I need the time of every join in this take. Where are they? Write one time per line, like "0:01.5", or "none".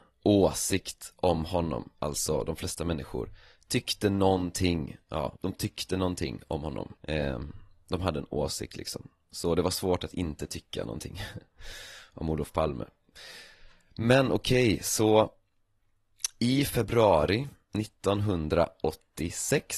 0:05.4
0:07.0